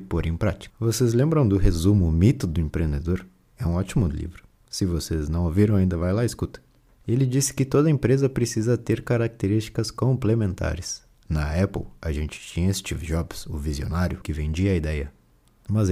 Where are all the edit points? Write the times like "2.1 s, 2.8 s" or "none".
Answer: 14.2 s